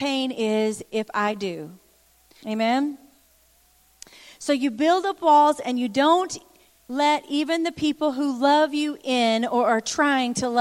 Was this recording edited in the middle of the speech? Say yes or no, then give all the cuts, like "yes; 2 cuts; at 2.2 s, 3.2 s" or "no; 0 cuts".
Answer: yes; 1 cut; at 2.4 s